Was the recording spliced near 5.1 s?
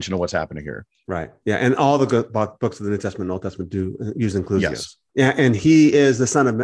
yes; 1 cut; at 5.1 s

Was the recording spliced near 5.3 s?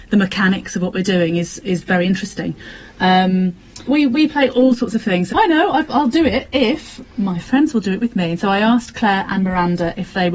yes; 2 cuts; at 3.8 s, 5.3 s

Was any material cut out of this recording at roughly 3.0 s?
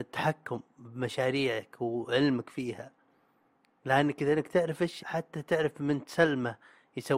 no; 1 cut; at 5.0 s

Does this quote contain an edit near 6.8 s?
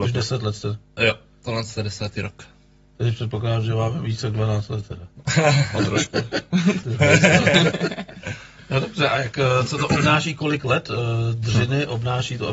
yes; 1 cut; at 6.8 s

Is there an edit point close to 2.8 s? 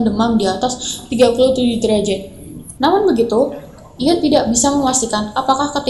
yes; 1 cut; at 2.8 s

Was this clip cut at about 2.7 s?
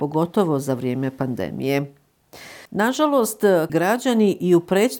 yes; 2 cuts; at 2.7 s, 3.7 s

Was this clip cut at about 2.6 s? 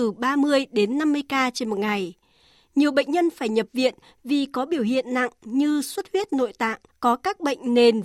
no; 1 cut; at 6.9 s

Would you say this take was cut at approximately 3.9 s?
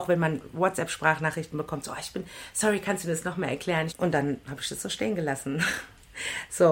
yes; 1 cut; at 3.9 s

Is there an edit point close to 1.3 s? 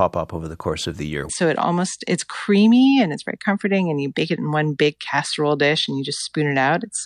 yes; 1 cut; at 1.3 s

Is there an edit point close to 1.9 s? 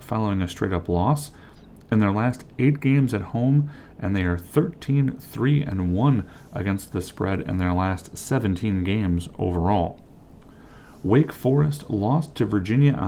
no; 1 cut; at 3.9 s

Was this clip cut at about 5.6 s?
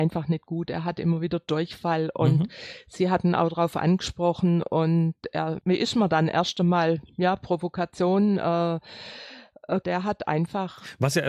yes; 2 cuts; at 5.6 s, 9.8 s

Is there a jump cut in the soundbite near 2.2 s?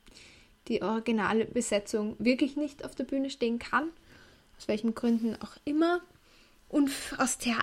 no; 1 cut; at 6.6 s

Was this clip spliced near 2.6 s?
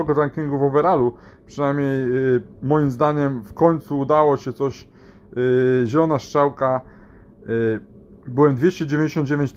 yes; 1 cut; at 2.6 s

